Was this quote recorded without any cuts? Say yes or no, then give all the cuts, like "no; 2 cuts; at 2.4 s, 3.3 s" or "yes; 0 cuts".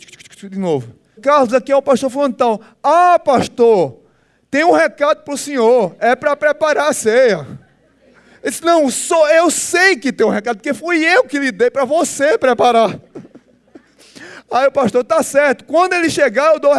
no; 1 cut; at 1.2 s